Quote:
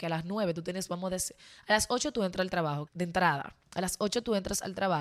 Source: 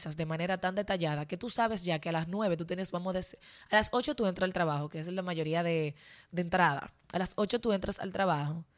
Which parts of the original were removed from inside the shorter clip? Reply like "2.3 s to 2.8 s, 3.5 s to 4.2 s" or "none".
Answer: 4.9 s to 6.2 s